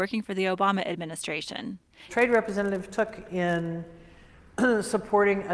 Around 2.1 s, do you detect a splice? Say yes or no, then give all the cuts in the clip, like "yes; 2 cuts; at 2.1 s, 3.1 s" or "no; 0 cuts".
yes; 1 cut; at 2.1 s